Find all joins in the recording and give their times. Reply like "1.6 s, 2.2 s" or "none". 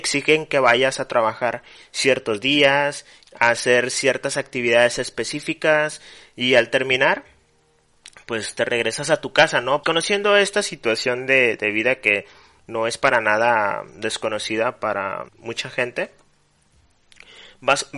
3.2 s, 9.8 s, 15.3 s